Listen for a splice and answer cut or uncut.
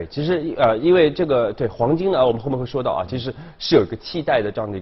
uncut